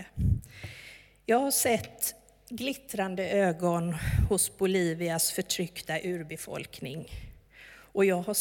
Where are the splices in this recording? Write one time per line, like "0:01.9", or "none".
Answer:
none